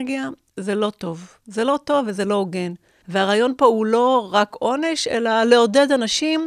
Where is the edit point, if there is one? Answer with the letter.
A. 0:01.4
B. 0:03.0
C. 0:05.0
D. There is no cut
B